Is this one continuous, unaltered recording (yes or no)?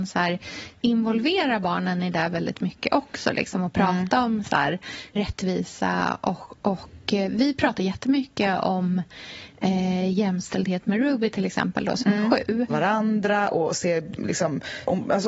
no